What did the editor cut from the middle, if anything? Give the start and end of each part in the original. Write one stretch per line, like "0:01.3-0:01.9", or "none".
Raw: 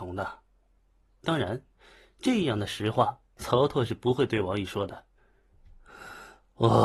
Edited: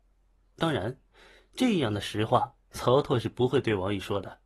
none